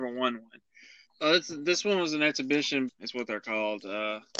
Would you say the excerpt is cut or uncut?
cut